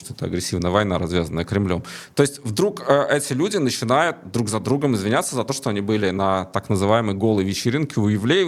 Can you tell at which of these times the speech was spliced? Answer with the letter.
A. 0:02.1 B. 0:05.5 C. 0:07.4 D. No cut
D